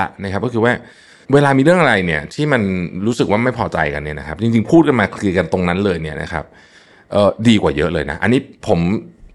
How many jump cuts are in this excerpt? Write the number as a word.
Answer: one